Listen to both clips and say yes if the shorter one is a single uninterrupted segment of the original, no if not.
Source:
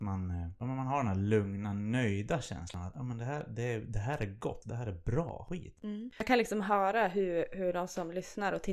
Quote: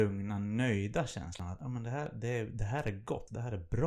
yes